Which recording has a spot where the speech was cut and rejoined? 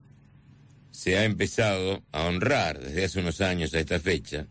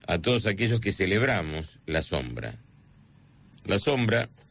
second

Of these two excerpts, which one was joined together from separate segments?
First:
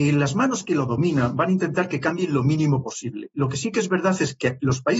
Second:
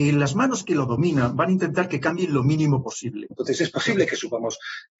second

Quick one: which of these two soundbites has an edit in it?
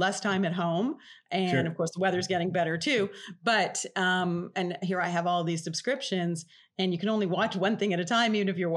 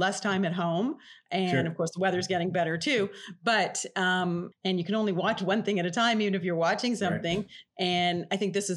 second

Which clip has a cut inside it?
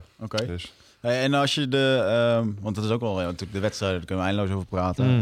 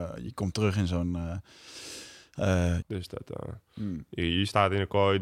second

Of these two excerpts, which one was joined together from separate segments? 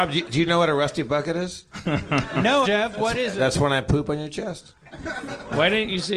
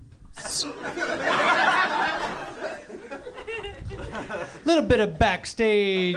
first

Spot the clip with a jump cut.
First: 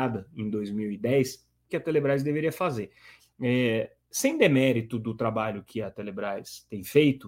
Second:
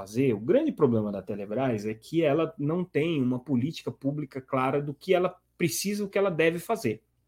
first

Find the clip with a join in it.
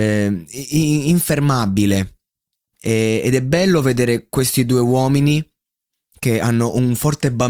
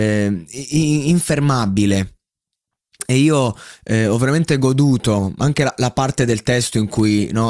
first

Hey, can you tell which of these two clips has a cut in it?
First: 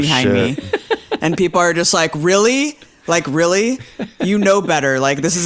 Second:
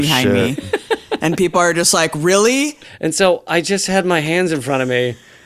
second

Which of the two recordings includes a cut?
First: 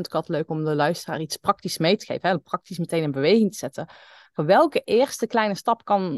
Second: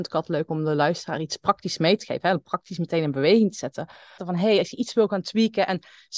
second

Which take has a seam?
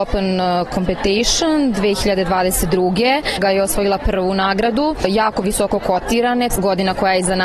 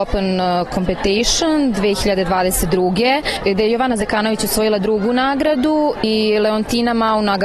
first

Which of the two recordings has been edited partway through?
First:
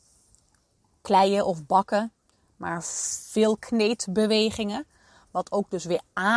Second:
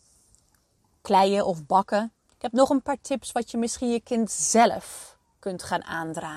second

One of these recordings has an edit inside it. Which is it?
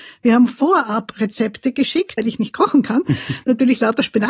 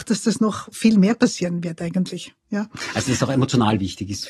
first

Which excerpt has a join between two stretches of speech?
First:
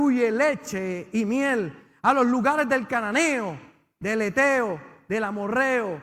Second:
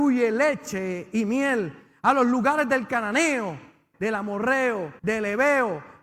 second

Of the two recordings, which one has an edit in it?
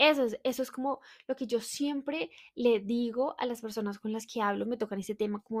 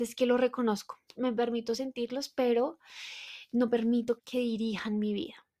second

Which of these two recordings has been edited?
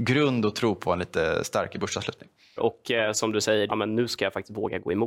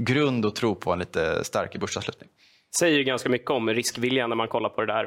first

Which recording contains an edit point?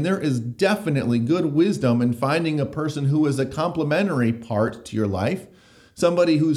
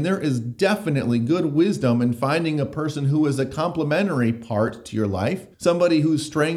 second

